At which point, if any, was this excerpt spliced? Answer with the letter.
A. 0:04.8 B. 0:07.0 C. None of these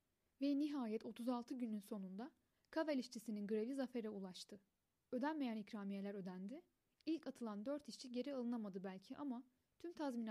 C